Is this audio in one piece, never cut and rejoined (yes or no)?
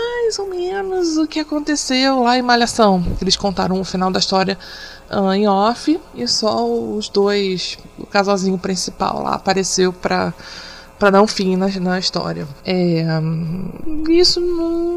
yes